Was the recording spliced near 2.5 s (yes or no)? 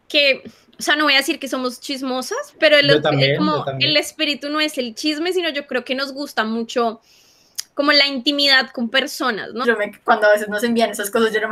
yes